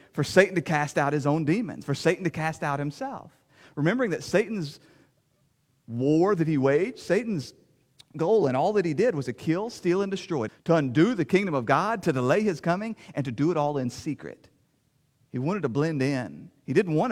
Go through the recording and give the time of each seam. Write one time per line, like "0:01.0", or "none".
0:10.5